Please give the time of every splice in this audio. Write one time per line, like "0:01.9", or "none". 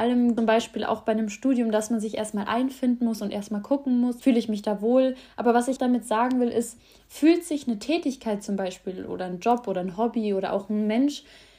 0:04.2
0:05.8